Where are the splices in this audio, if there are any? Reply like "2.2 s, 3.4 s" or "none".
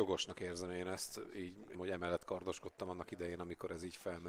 1.7 s

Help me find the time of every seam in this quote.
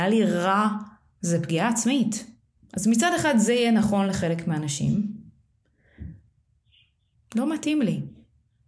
2.6 s, 7.2 s

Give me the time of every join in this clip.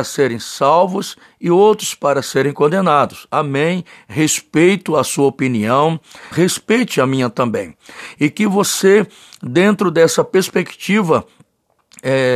6.3 s

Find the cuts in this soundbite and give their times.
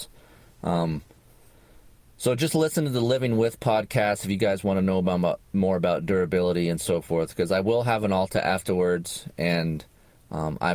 none

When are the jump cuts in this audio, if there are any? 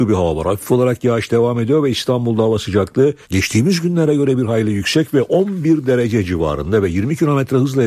3.2 s

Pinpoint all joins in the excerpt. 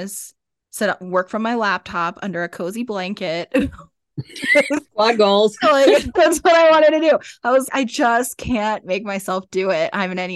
7.7 s

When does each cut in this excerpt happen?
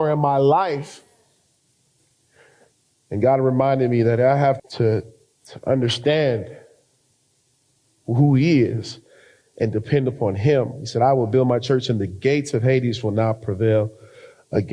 4.6 s

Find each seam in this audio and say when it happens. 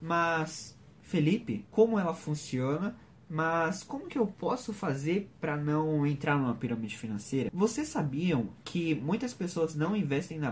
1.7 s

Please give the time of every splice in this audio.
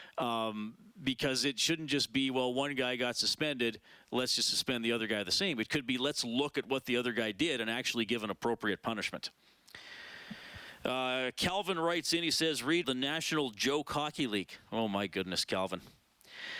12.8 s

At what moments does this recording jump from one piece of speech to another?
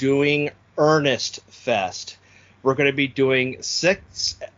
none

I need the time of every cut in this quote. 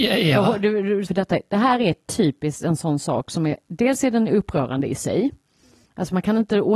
1.1 s

